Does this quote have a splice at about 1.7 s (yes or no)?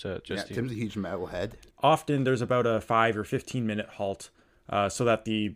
yes